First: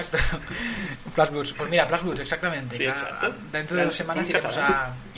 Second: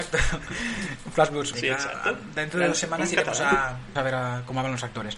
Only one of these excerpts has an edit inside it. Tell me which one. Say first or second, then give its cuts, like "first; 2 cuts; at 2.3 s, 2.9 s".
second; 2 cuts; at 1.5 s, 4.0 s